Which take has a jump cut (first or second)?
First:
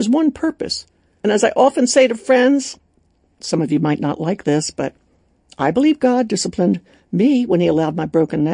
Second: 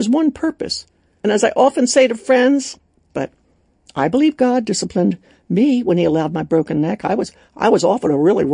second